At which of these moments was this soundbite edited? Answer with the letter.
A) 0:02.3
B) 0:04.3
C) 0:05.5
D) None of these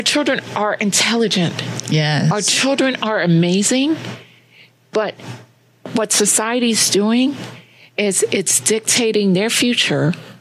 D